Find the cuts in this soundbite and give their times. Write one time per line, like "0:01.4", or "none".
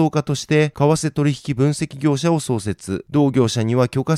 0:03.1